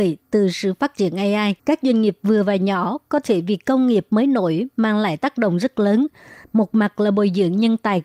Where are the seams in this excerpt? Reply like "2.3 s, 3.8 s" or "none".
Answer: 1.6 s, 6.4 s